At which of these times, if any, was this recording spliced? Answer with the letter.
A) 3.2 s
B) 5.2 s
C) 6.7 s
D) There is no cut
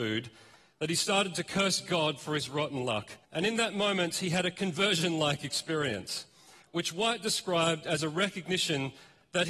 A